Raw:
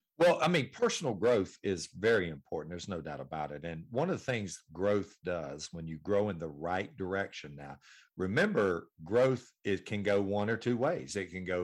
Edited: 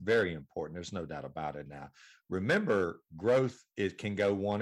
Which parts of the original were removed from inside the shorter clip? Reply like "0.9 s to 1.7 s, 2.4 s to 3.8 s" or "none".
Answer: 3.6 s to 7.5 s